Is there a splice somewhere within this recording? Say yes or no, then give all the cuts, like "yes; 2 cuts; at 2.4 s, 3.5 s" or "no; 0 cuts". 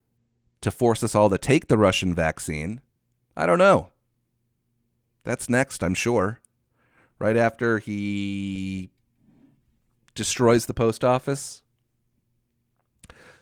no; 0 cuts